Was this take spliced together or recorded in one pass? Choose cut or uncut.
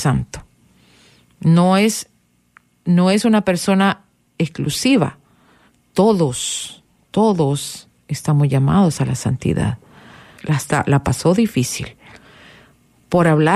cut